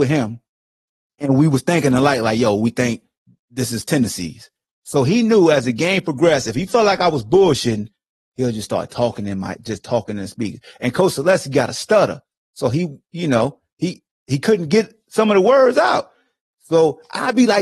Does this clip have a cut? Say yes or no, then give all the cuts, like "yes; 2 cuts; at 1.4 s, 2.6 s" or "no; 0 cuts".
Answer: no; 0 cuts